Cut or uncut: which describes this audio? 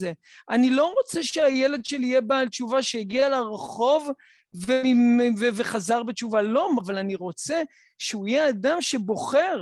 cut